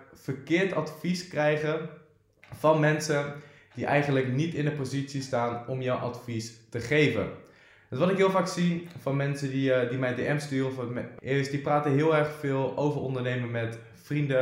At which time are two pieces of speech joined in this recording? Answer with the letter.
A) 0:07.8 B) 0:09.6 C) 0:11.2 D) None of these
C